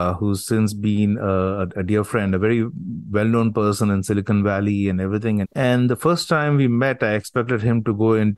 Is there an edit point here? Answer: yes; 1 cut; at 5.4 s

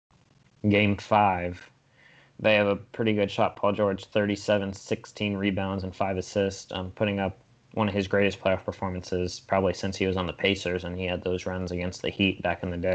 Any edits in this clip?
no; 0 cuts

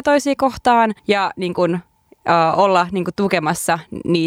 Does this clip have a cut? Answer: yes; 1 cut; at 1.0 s

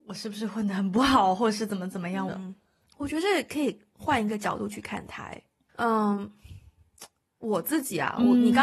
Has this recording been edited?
yes; 2 cuts; at 2.3 s, 5.7 s

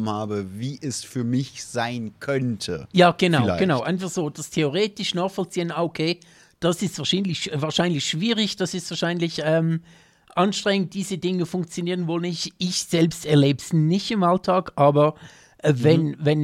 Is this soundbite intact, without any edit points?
yes; 0 cuts

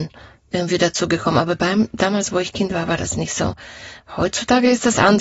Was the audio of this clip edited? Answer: yes; 1 cut; at 4.0 s

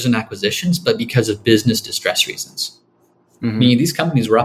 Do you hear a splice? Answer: no; 0 cuts

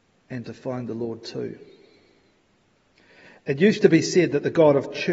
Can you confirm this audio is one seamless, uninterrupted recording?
yes; 0 cuts

